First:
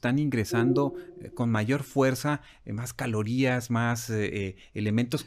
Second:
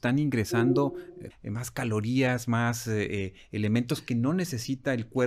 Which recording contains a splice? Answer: second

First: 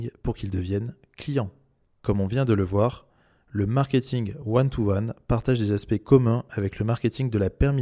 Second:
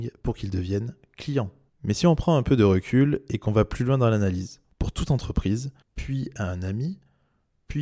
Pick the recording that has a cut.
second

